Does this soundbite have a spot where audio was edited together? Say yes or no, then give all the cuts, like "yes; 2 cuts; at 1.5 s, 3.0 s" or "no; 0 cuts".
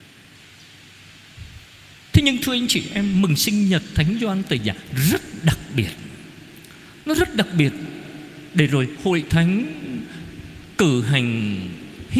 no; 0 cuts